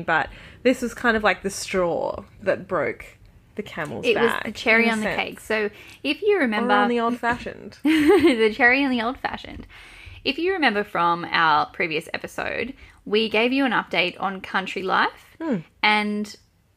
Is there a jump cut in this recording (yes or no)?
no